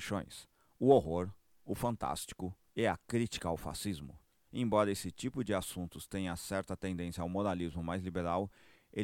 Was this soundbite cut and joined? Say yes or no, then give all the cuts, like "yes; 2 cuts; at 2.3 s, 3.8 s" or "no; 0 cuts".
yes; 1 cut; at 4.5 s